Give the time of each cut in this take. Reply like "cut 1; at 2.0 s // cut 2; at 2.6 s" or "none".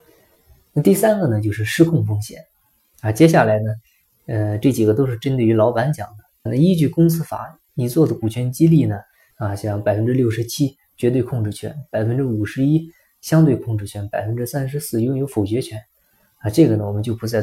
cut 1; at 6.5 s // cut 2; at 9.3 s